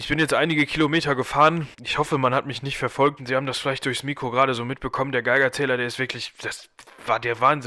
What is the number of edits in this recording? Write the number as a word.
two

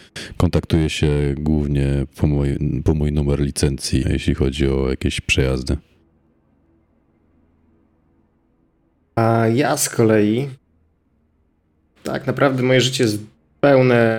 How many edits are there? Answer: one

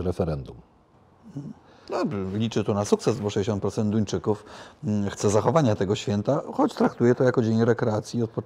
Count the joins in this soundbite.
zero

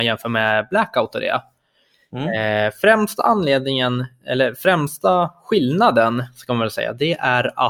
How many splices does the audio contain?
zero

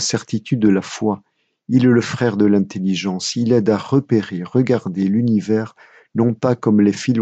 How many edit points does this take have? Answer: zero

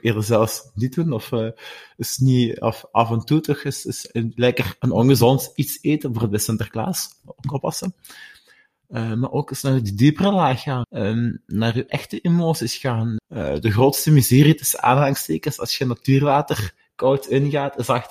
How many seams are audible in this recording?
two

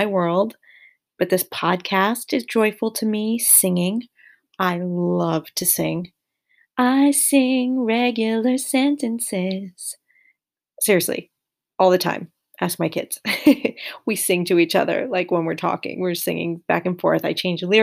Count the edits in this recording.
zero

